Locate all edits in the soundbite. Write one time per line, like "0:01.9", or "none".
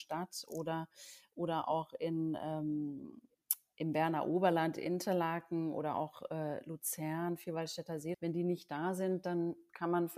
0:08.1